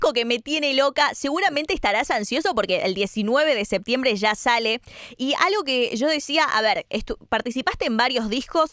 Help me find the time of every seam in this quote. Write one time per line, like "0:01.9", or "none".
none